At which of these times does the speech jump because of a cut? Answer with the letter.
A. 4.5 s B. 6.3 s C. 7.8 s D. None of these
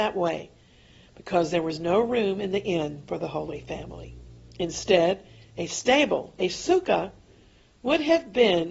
D